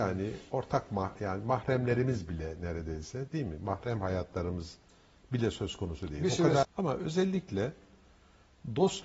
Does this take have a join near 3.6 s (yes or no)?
no